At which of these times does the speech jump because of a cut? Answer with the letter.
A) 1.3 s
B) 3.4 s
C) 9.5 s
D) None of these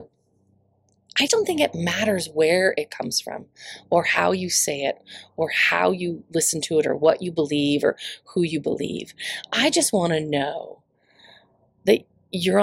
A